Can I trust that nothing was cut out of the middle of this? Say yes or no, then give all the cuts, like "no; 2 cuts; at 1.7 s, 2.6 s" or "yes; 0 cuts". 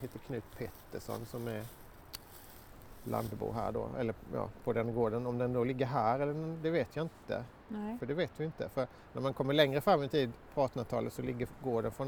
yes; 0 cuts